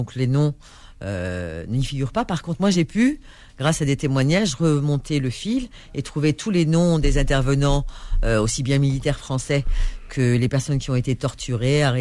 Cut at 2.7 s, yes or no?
no